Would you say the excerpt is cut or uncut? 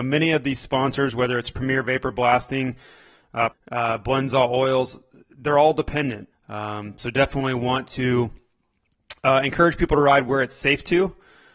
cut